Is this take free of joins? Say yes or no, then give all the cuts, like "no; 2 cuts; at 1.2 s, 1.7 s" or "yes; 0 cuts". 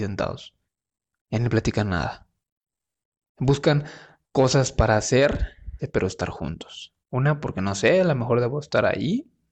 no; 2 cuts; at 5.8 s, 7.0 s